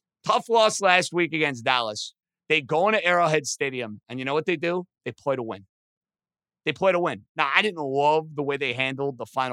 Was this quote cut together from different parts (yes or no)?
no